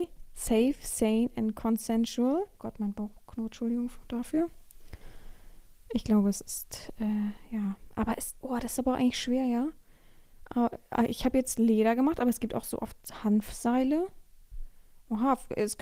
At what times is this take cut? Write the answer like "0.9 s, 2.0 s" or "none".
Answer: 2.6 s